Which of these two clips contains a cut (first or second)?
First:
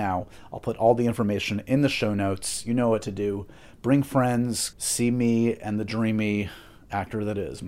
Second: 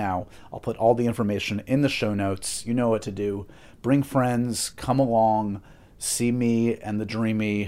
first